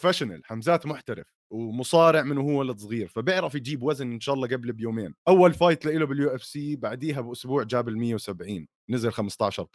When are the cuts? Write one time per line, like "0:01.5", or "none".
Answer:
0:05.2